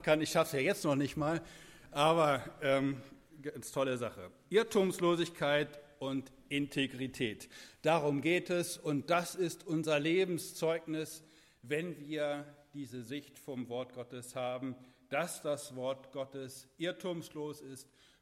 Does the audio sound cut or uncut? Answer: uncut